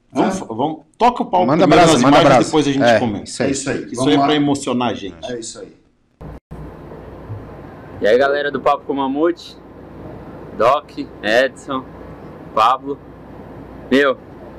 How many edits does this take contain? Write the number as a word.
zero